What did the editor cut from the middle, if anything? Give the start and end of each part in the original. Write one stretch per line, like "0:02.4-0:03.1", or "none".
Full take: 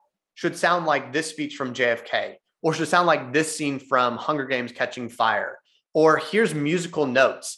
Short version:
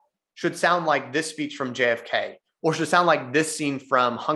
none